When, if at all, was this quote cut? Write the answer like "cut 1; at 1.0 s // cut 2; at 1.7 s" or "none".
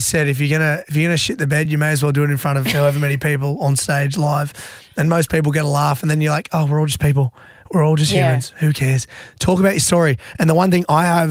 none